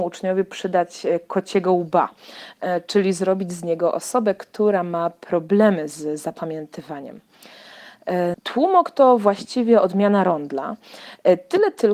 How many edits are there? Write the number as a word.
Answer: one